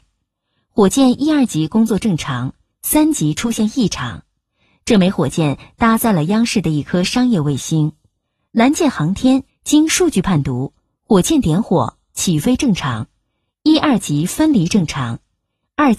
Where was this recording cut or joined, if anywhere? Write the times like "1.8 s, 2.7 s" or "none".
9.5 s, 13.6 s

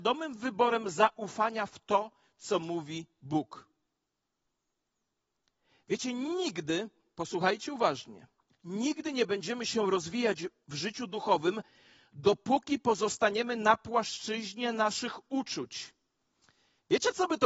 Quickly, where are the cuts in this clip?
none

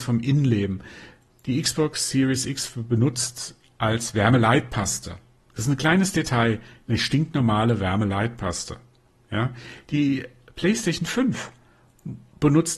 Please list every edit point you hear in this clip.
none

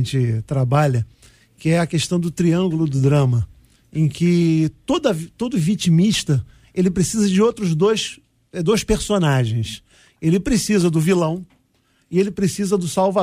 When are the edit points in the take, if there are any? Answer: none

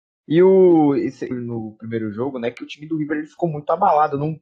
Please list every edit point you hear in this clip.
1.3 s

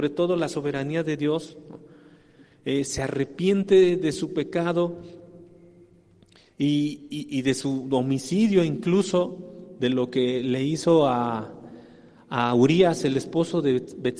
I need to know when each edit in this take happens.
none

